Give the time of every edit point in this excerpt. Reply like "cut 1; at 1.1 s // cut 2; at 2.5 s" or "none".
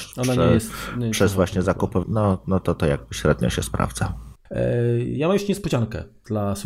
cut 1; at 2.0 s